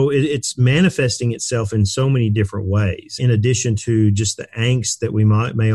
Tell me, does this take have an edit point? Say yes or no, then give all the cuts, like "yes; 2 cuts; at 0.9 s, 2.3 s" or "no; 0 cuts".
yes; 1 cut; at 3.2 s